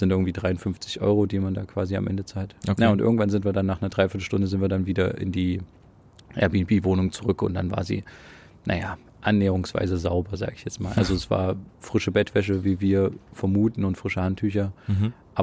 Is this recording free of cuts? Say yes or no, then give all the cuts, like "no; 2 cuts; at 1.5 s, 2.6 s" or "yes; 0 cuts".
yes; 0 cuts